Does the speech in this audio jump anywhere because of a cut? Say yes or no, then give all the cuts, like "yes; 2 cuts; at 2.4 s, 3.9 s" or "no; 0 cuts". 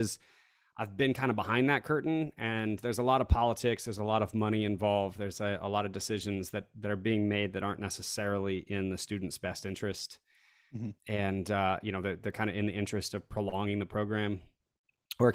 no; 0 cuts